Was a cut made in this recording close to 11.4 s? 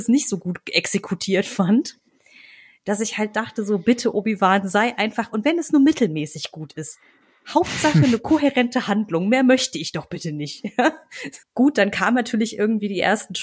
yes; 1 cut; at 11.4 s

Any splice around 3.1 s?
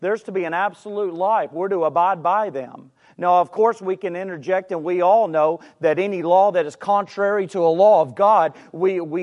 no; 0 cuts

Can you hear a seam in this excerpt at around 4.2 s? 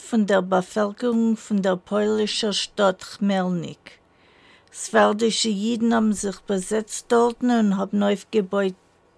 no; 0 cuts

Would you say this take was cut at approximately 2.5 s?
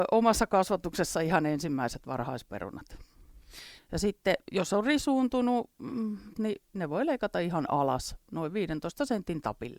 no; 2 cuts; at 3.8 s, 6.3 s

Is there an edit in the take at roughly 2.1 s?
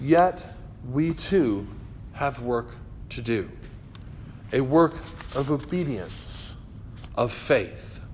no; 1 cut; at 7.1 s

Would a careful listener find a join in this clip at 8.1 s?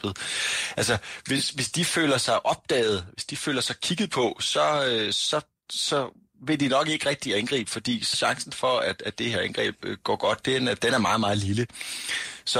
yes; 1 cut; at 8.1 s

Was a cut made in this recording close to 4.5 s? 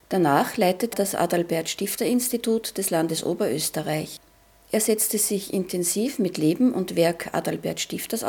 no; 1 cut; at 0.9 s

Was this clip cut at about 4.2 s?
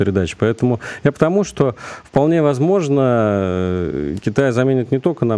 no; 1 cut; at 1.1 s

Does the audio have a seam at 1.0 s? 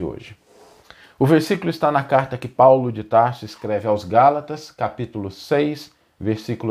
no; 0 cuts

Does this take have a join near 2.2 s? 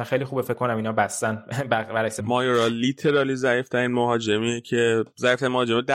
yes; 1 cut; at 2.2 s

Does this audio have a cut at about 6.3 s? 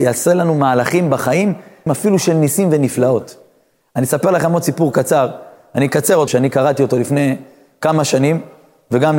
yes; 2 cuts; at 1.9 s, 6.3 s

